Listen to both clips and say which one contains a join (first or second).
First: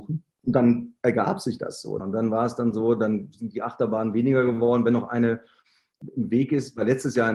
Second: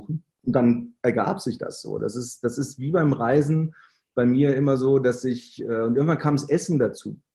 first